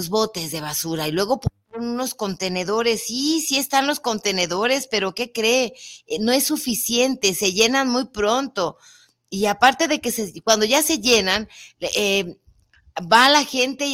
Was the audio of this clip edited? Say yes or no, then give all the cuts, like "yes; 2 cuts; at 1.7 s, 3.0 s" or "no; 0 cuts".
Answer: no; 0 cuts